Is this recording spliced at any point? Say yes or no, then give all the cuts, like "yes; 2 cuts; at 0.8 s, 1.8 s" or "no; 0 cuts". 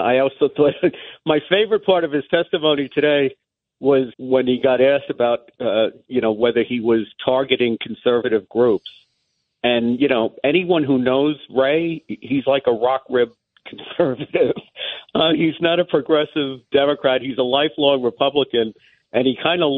yes; 1 cut; at 4.1 s